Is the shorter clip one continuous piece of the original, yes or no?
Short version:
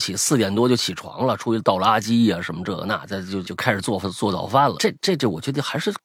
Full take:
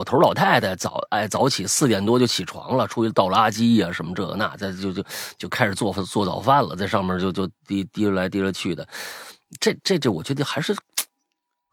no